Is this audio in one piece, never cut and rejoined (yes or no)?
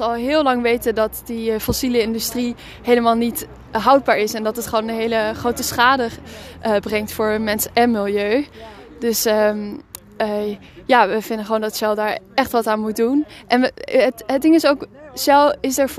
yes